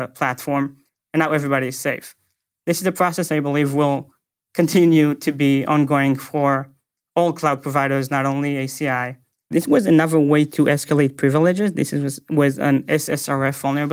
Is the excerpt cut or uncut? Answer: cut